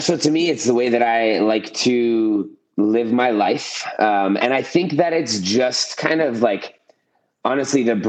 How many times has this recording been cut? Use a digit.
0